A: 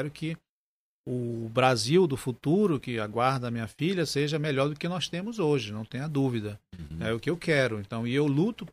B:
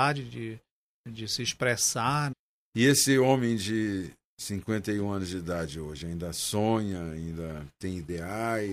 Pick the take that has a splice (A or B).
B